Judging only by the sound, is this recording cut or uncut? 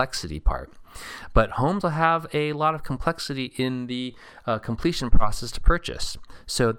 cut